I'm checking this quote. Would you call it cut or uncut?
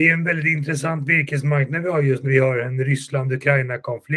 cut